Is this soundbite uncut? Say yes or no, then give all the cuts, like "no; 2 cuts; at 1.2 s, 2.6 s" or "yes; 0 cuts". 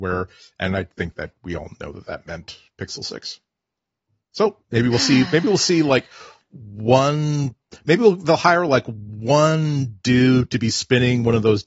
no; 1 cut; at 4.6 s